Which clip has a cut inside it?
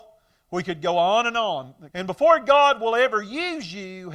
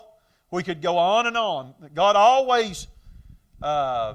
first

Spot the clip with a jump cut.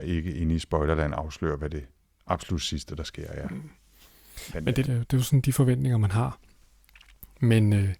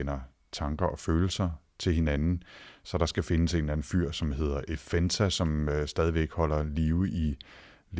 first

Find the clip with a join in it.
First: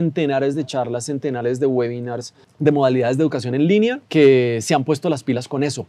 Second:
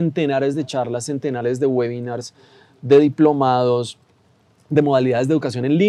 first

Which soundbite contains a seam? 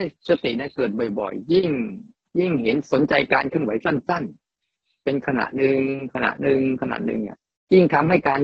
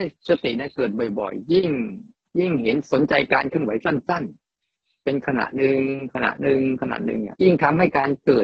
second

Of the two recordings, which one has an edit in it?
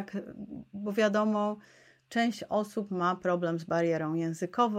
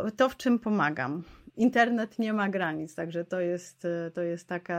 second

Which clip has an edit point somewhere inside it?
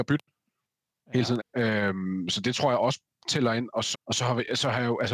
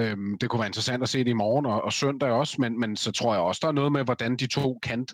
first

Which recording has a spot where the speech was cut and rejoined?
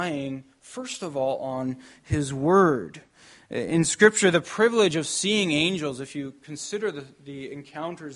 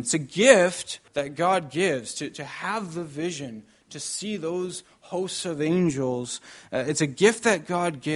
second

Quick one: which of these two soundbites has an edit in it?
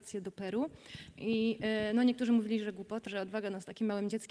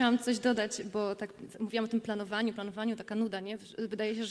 first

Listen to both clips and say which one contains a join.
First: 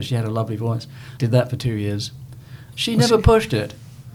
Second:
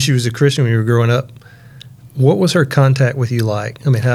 first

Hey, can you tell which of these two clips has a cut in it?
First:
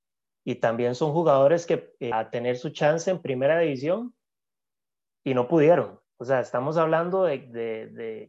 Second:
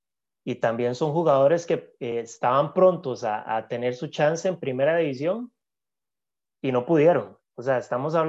first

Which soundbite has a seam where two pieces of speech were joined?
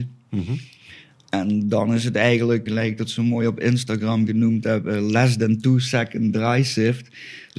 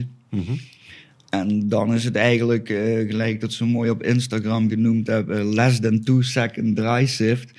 first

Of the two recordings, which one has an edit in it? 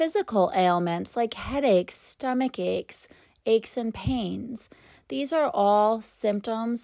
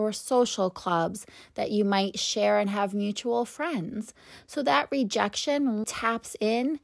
second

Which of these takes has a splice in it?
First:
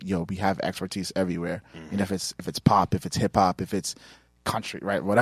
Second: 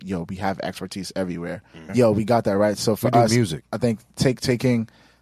second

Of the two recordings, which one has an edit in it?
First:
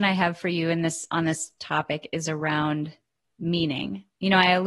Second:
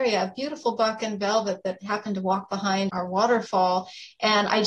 second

